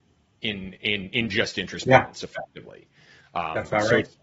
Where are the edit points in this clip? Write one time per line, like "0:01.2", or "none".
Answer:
none